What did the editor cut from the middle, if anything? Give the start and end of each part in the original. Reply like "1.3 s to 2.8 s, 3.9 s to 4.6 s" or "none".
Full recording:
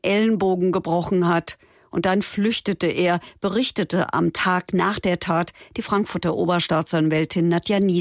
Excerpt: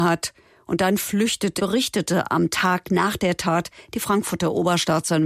2.8 s to 3.4 s